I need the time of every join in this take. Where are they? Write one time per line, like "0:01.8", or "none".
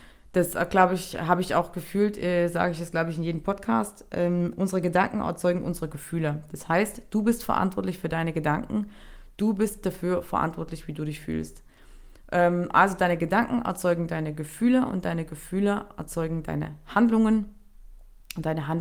none